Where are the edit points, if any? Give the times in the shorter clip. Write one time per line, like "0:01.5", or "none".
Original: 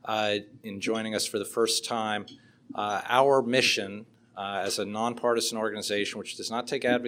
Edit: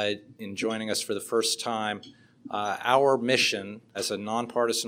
0:03.9

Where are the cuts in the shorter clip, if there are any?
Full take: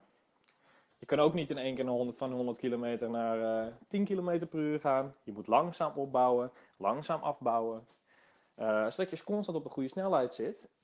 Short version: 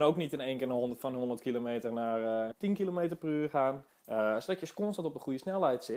0:02.5
0:03.9

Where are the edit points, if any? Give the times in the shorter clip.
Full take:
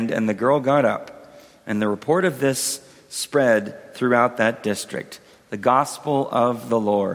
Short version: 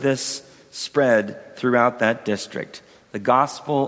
none

